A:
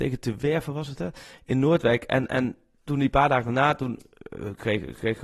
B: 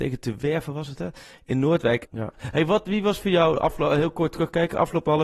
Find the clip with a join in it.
B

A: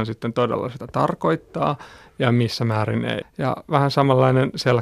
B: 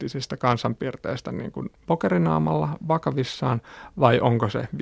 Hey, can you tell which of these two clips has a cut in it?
A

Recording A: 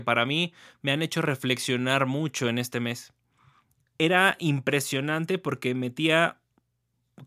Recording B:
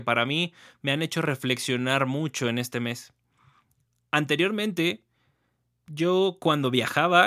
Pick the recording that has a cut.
A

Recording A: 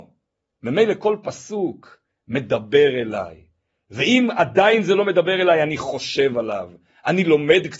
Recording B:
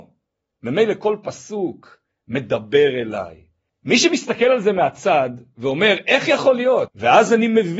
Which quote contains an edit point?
B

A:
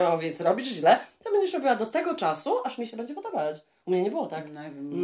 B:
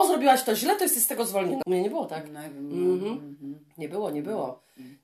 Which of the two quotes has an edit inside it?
B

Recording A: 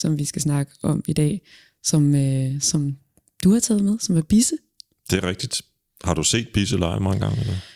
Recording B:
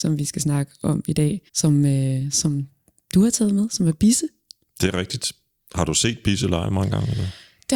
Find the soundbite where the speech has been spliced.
B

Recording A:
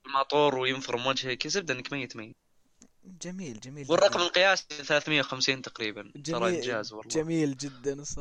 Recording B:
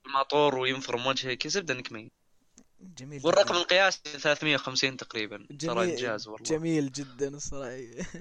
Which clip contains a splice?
B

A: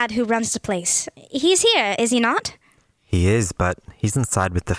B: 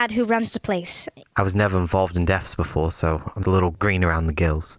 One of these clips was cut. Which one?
B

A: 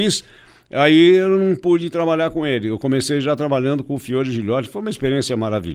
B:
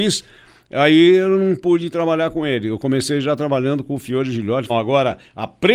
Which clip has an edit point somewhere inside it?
B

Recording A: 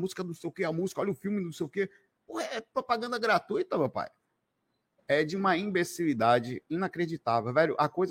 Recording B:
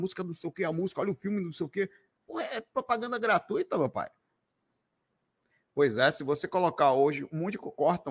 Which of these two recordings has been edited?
A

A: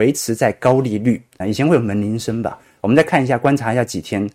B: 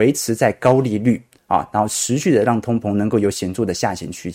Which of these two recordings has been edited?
A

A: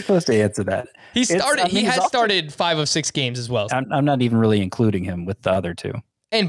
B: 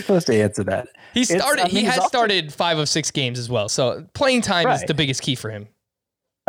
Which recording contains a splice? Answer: A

